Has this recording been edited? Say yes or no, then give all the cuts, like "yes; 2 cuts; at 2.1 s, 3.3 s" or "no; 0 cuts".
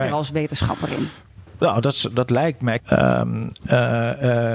yes; 1 cut; at 2.8 s